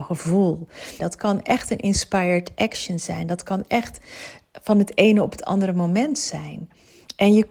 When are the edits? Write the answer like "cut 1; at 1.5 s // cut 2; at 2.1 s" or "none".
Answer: cut 1; at 1.0 s